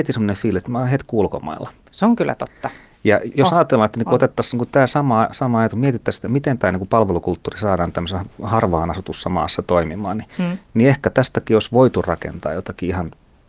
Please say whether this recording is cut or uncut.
uncut